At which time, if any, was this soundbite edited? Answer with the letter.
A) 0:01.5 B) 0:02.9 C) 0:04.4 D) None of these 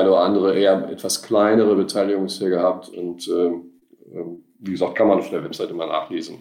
B